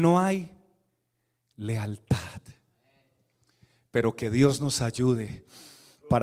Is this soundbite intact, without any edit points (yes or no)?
yes